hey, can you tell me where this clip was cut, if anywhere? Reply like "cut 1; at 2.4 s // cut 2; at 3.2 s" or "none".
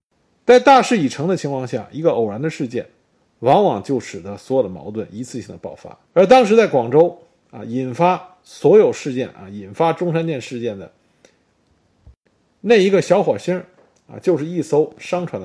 cut 1; at 6.0 s

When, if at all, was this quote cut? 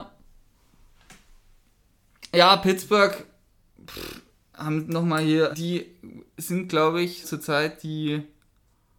cut 1; at 5.5 s // cut 2; at 7.2 s

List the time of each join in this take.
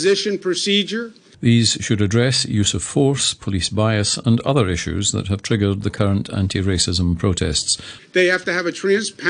cut 1; at 1.3 s // cut 2; at 8.0 s

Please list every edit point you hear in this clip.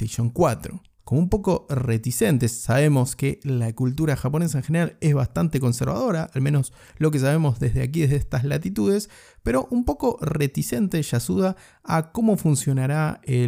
cut 1; at 1.0 s

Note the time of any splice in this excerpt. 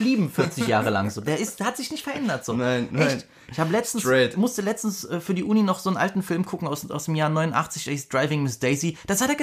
none

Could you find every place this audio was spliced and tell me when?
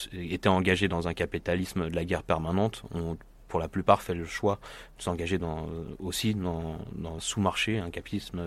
cut 1; at 7.2 s

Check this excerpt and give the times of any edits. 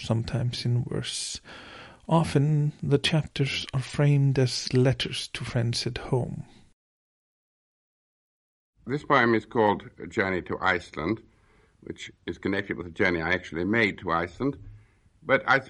none

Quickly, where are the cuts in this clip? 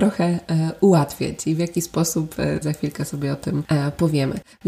cut 1; at 2.6 s

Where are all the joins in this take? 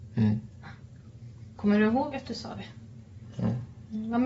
none

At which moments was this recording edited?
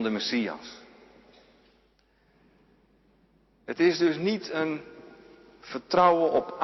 none

